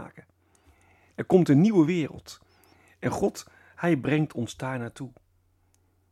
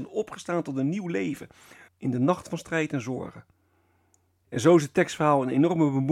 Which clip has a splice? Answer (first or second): second